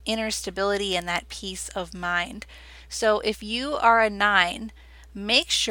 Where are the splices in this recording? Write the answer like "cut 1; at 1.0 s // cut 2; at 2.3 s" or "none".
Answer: none

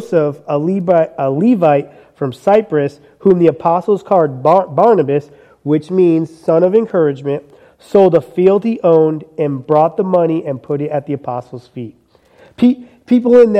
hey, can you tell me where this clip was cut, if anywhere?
none

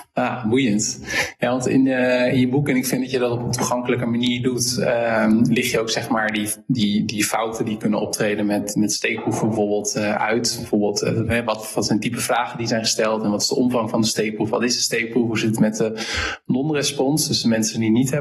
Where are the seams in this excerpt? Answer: none

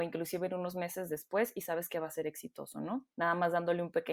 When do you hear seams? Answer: cut 1; at 3.1 s

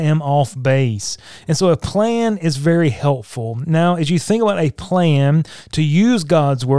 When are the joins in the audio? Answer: none

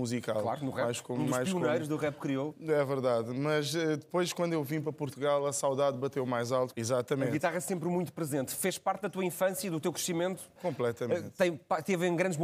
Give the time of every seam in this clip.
cut 1; at 6.7 s // cut 2; at 10.6 s

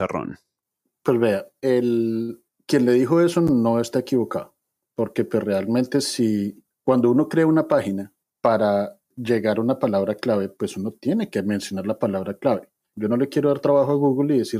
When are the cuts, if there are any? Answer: cut 1; at 12.9 s

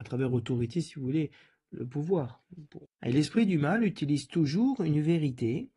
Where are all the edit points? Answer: cut 1; at 2.9 s

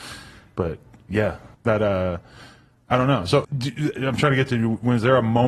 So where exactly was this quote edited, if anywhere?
cut 1; at 1.5 s // cut 2; at 3.4 s

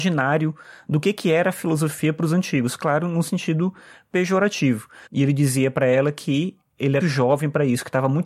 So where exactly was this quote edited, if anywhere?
cut 1; at 5.1 s // cut 2; at 7.0 s

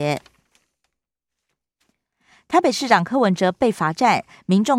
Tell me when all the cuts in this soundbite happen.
none

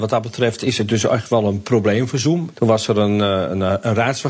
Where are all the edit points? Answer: cut 1; at 2.5 s

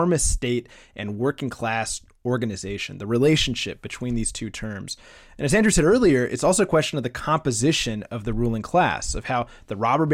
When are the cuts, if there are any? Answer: none

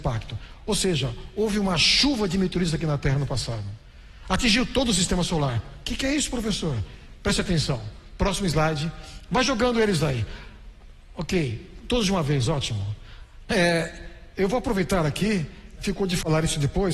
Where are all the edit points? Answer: cut 1; at 13.4 s // cut 2; at 15.8 s

